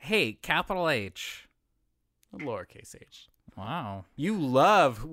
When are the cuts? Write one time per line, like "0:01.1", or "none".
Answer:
0:04.2